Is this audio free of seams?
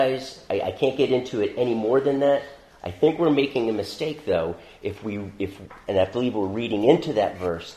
yes; 0 cuts

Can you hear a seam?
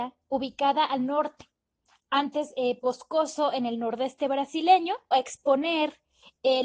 yes; 2 cuts; at 2.8 s, 5.1 s

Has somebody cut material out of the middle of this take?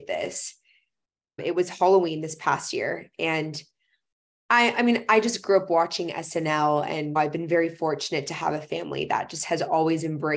no; 0 cuts

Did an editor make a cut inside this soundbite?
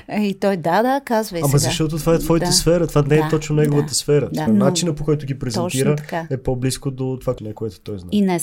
yes; 2 cuts; at 4.5 s, 7.4 s

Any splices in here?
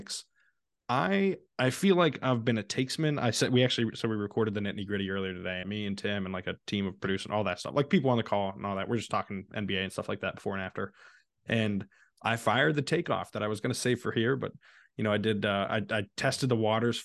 yes; 1 cut; at 5.6 s

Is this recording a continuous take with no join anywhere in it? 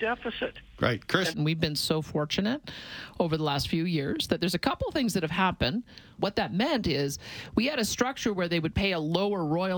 no; 2 cuts; at 1.3 s, 6.2 s

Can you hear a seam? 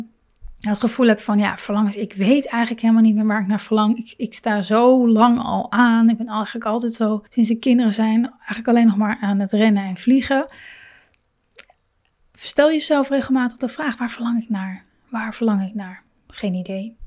yes; 1 cut; at 7.3 s

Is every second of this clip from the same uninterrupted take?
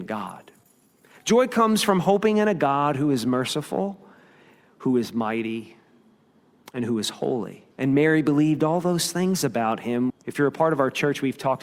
no; 2 cuts; at 7.7 s, 10.1 s

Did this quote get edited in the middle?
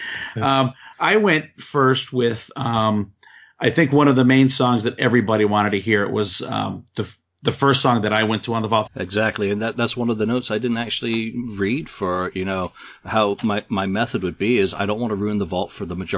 yes; 1 cut; at 8.9 s

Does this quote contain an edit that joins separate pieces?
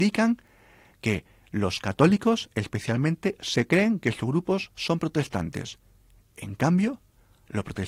no; 0 cuts

